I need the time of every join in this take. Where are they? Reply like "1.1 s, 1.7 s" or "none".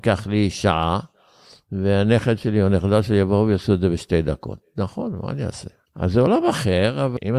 5.9 s